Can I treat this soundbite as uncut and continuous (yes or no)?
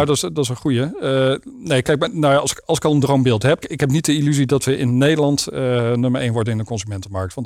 no